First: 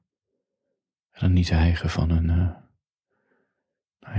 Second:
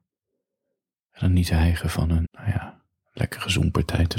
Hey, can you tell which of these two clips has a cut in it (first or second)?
second